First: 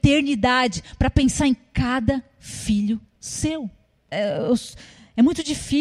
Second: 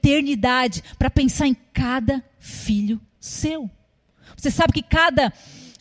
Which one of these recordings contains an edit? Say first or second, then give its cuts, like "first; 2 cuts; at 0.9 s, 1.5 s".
first; 1 cut; at 4.1 s